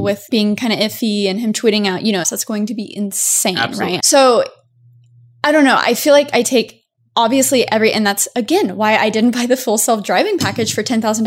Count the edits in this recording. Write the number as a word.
two